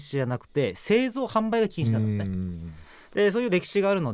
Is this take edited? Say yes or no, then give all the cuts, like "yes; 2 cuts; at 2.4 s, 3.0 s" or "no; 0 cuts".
no; 0 cuts